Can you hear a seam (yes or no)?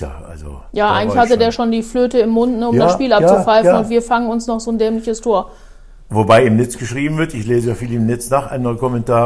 no